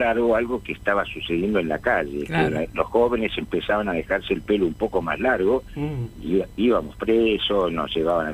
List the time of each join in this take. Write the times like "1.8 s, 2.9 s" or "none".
none